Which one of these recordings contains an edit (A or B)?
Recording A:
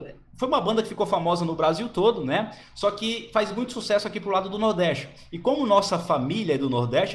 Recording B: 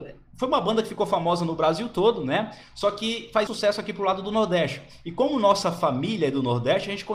B